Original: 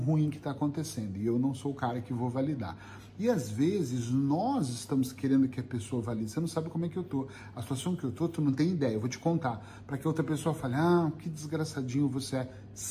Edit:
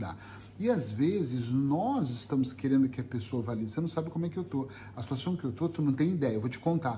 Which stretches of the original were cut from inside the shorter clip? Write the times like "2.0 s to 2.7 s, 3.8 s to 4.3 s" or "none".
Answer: none